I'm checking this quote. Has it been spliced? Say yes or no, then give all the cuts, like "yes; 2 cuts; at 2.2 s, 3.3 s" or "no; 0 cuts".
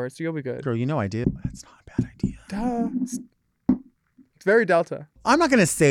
yes; 1 cut; at 1.2 s